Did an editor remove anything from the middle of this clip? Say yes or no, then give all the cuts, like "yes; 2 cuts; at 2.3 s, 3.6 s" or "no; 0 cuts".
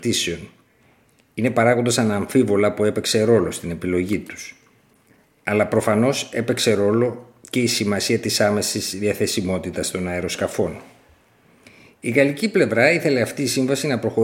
no; 0 cuts